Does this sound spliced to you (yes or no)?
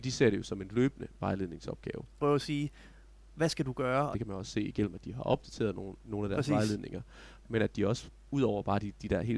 yes